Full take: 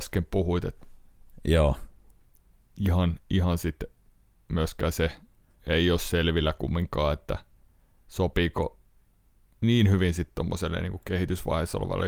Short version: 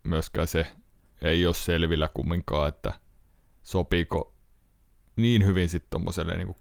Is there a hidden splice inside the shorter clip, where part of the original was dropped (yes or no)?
no